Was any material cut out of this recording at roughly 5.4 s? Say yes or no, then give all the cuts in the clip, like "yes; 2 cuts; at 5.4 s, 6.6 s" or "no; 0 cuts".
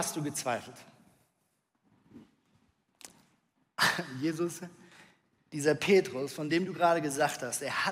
yes; 1 cut; at 5.4 s